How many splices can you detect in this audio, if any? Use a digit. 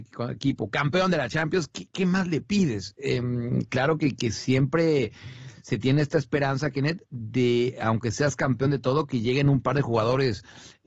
0